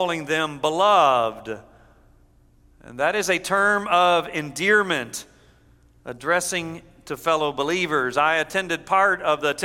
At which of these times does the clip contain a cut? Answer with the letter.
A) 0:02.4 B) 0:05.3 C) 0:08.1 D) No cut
D